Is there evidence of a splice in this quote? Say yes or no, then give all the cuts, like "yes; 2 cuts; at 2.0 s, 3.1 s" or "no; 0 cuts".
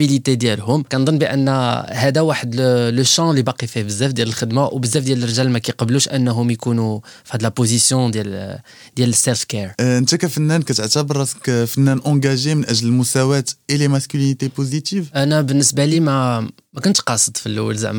no; 0 cuts